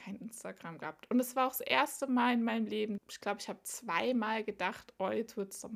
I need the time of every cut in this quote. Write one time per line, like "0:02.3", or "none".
0:03.0